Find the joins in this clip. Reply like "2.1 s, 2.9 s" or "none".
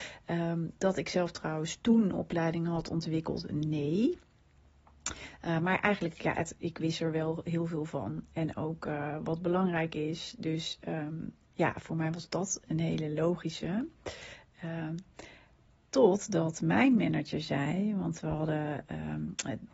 none